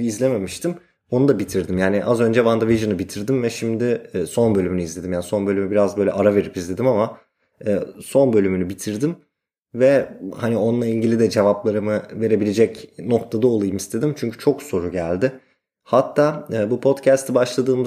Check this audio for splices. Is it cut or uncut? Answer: uncut